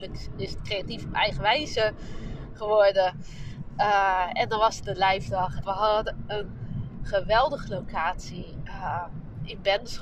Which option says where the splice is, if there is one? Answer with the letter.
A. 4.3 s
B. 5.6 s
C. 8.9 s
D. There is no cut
B